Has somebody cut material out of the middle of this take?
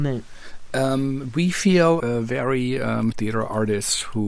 yes; 2 cuts; at 2.0 s, 3.1 s

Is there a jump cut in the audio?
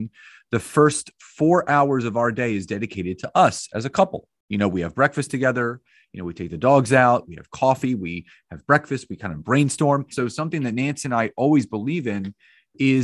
yes; 1 cut; at 10.1 s

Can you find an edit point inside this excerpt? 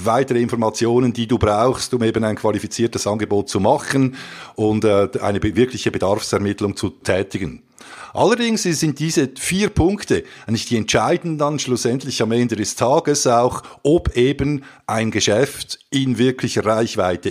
no; 0 cuts

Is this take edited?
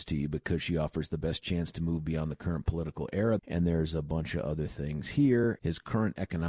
yes; 2 cuts; at 3.4 s, 5.6 s

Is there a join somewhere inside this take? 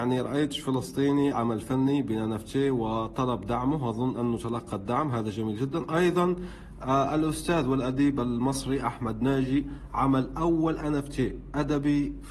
yes; 1 cut; at 1.3 s

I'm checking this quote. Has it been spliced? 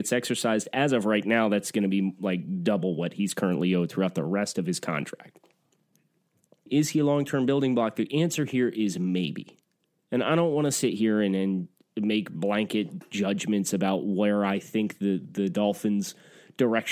yes; 1 cut; at 6.7 s

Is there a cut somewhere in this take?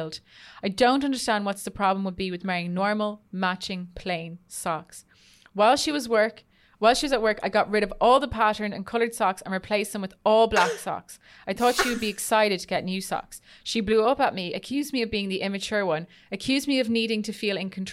no; 0 cuts

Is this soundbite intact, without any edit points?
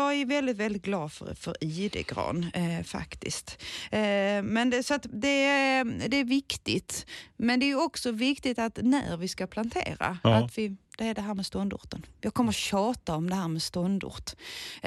no; 1 cut; at 10.9 s

